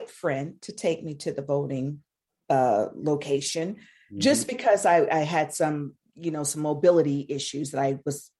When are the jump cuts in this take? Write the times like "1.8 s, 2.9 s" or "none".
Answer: none